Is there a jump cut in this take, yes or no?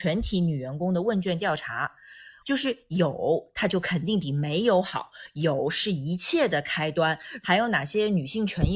yes